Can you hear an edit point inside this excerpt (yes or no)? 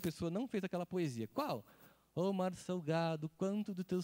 no